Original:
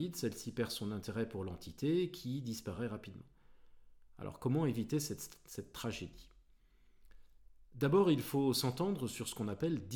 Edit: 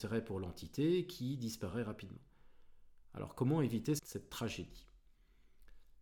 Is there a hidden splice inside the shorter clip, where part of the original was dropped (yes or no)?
yes